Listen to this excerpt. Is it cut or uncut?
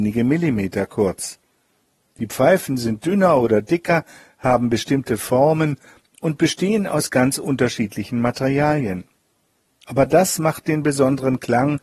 uncut